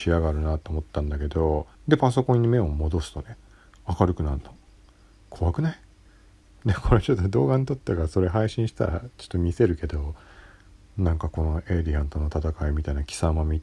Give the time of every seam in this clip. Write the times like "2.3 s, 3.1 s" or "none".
1.7 s